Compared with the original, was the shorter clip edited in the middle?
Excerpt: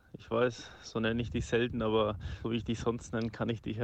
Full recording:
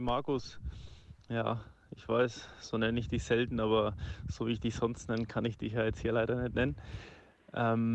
yes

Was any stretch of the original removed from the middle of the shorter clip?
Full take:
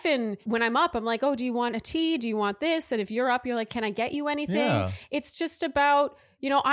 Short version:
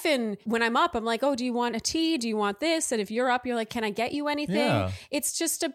no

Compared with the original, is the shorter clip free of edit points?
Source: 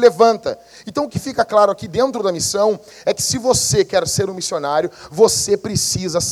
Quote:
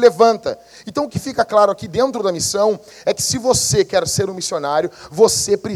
yes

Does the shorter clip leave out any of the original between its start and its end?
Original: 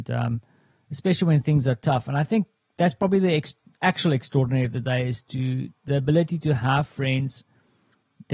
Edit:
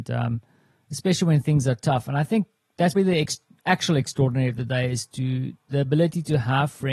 yes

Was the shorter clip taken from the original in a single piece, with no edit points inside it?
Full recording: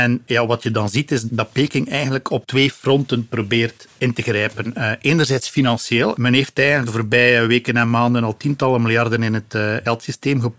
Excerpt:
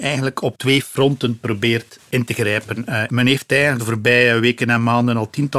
no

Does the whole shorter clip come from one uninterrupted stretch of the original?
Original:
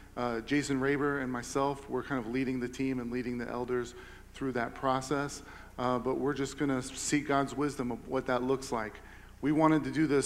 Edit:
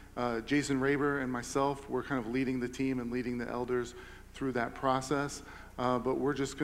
yes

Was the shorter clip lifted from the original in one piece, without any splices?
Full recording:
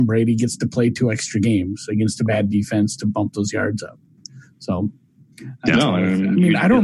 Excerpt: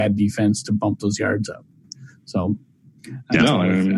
yes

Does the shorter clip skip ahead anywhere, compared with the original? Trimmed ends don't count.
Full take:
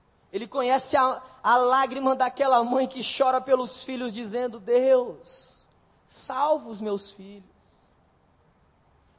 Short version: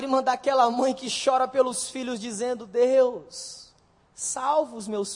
no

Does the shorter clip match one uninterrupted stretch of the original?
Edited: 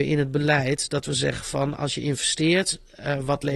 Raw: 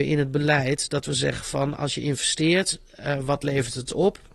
yes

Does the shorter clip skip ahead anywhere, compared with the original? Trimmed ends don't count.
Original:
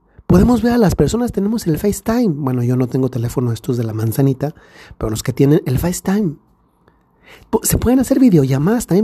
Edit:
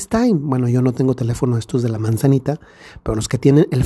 no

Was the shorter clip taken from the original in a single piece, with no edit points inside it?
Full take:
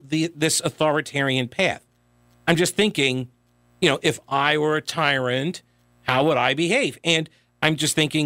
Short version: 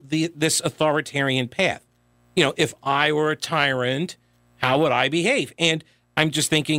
no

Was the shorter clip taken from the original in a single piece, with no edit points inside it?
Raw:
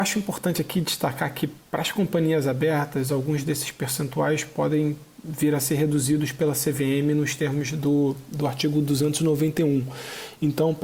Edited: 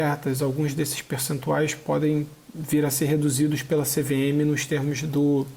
yes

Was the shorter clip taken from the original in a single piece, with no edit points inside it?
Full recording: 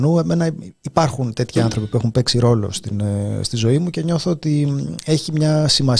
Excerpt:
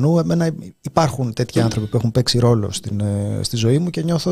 yes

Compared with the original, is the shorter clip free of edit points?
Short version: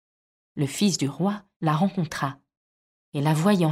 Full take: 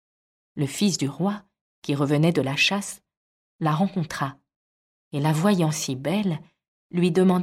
no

